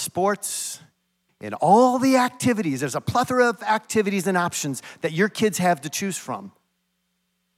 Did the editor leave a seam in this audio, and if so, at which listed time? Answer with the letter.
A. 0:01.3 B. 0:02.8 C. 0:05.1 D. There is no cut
A